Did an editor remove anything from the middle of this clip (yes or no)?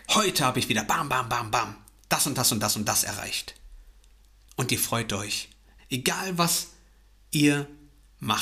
yes